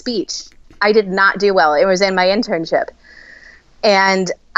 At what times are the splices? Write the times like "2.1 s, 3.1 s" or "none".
none